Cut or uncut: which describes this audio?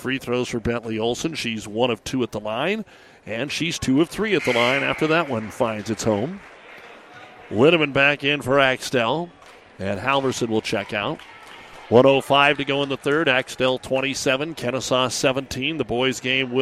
uncut